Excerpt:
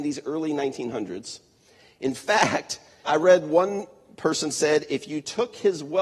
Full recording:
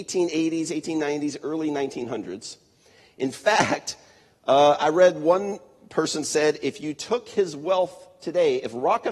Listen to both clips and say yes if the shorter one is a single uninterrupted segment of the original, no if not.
no